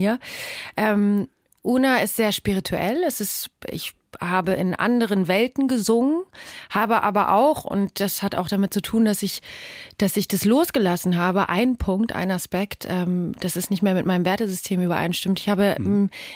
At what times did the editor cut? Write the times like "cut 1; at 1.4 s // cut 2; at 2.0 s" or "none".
none